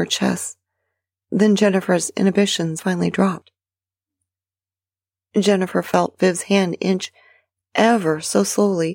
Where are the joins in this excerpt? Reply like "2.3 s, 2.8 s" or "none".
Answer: 1.2 s